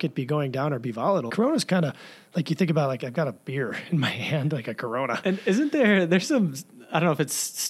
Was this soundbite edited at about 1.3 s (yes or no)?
yes